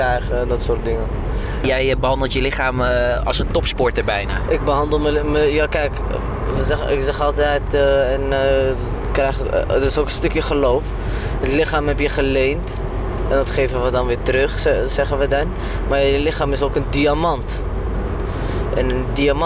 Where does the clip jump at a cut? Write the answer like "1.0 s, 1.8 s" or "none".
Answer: none